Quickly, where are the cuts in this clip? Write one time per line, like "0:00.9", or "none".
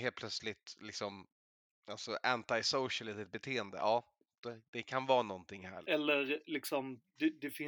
0:05.8